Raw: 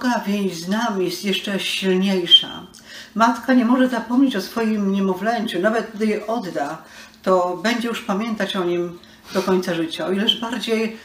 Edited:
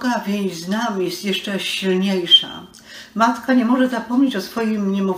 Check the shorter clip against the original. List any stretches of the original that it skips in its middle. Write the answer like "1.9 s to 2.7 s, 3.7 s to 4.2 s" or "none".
none